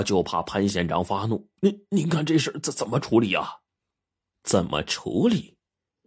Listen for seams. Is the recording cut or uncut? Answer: uncut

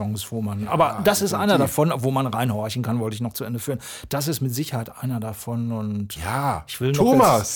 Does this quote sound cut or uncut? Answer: cut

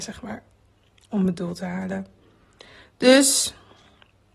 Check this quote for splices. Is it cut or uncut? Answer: uncut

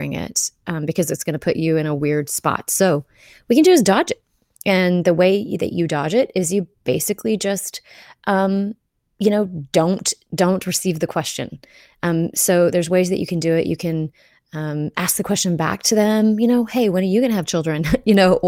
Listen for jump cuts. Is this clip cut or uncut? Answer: uncut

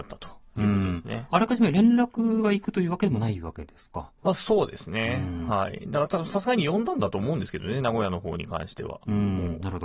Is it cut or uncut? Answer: uncut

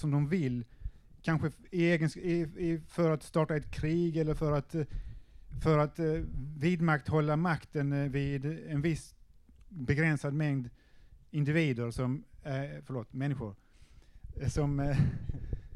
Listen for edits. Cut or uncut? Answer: uncut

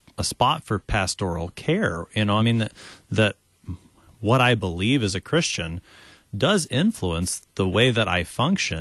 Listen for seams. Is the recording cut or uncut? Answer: uncut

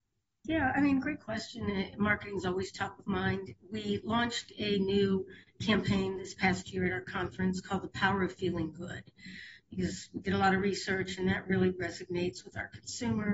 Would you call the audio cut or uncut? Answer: uncut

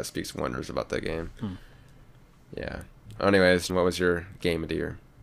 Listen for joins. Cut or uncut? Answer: cut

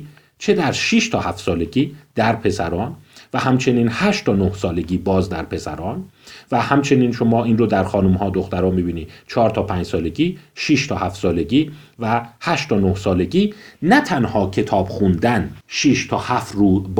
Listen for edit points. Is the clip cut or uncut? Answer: cut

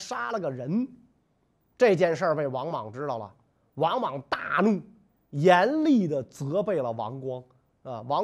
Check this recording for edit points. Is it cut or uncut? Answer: uncut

